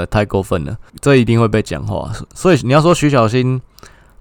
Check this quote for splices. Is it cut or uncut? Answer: uncut